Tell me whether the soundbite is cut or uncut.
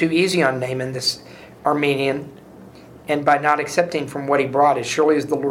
uncut